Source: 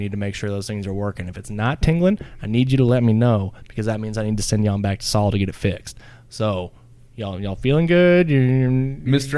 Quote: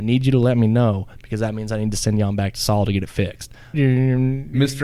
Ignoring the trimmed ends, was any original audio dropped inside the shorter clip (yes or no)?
yes